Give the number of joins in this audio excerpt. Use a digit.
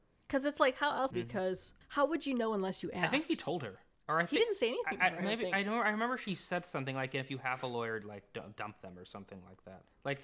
1